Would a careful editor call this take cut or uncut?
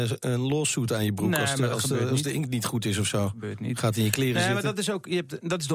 uncut